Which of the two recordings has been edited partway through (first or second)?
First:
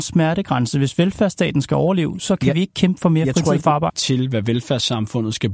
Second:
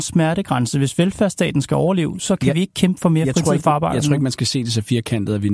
first